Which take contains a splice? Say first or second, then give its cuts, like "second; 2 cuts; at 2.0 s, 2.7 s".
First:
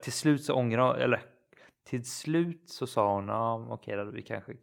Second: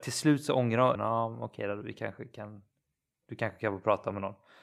second; 1 cut; at 1.0 s